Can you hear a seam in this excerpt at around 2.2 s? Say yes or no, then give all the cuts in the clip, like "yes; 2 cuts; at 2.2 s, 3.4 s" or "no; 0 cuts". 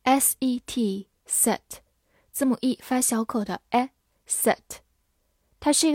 no; 0 cuts